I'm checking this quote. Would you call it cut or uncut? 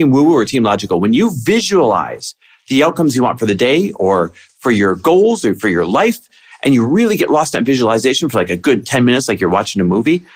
uncut